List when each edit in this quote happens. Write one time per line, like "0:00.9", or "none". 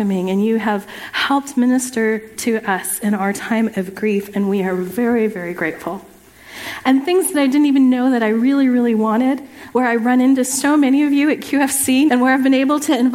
0:09.7
0:12.1